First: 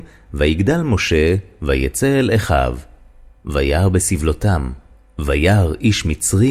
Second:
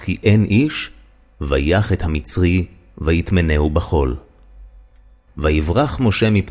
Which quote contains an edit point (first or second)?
second